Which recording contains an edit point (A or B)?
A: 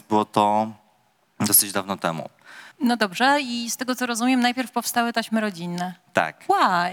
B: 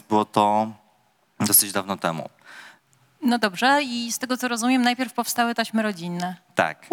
A